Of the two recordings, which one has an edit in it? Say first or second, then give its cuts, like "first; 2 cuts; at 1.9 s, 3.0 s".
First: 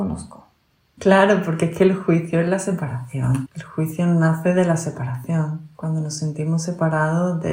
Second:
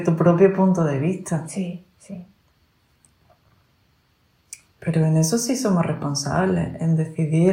first; 2 cuts; at 1.0 s, 3.5 s